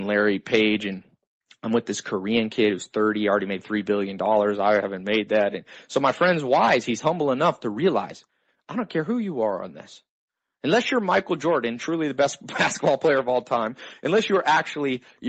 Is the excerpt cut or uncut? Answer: uncut